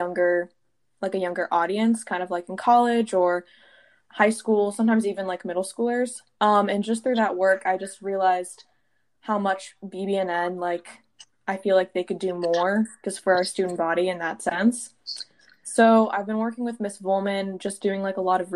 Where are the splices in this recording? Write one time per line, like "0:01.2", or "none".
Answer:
none